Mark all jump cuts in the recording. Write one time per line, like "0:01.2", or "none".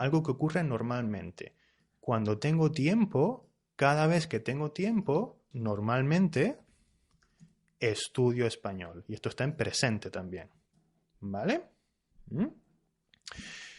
0:05.5